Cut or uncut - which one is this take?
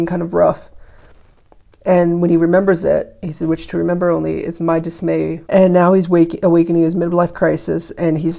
cut